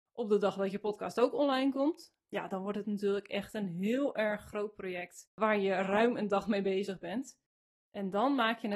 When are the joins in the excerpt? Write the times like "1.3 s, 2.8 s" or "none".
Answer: none